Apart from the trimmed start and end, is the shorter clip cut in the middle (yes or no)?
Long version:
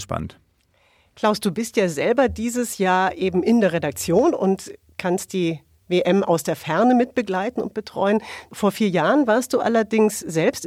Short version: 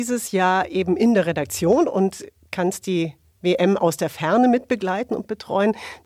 no